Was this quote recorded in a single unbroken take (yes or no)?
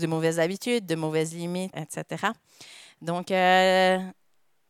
no